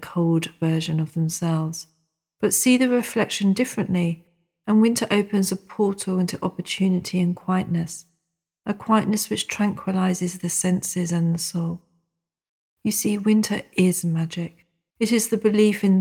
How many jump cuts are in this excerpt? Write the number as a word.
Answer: one